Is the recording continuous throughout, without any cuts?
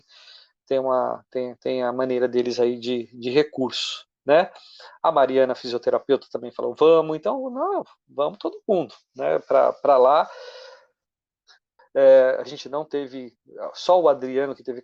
no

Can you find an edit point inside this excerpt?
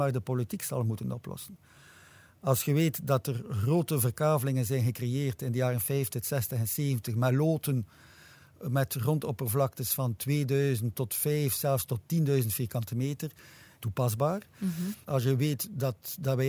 yes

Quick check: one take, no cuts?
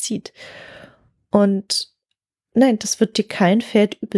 yes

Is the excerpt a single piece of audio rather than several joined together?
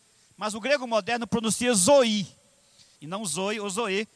no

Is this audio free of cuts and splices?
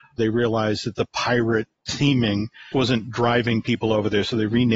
no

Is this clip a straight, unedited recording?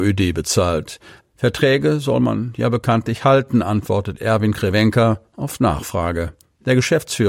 no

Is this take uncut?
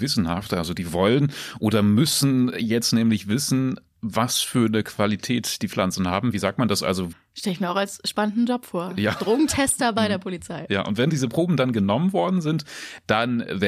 no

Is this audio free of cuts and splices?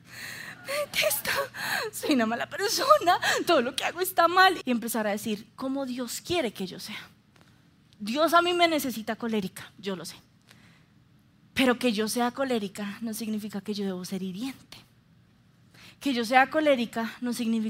no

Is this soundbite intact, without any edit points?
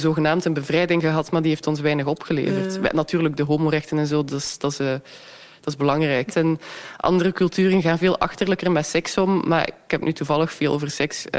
no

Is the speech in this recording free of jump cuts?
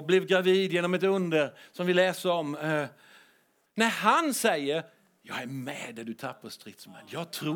no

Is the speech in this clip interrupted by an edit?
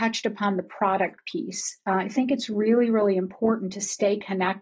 no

